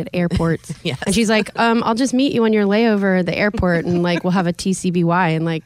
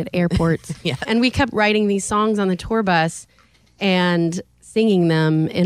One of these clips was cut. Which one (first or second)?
second